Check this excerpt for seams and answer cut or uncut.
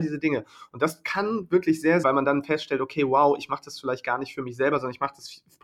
cut